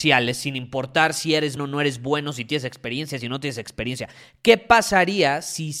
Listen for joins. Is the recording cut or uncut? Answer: cut